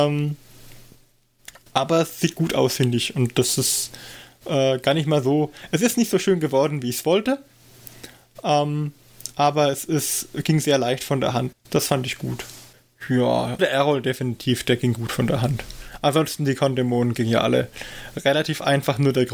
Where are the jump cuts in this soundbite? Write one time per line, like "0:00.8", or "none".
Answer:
0:11.5
0:13.6